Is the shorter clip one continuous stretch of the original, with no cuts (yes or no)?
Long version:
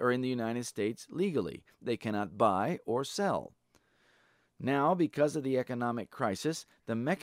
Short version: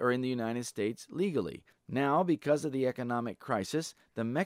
no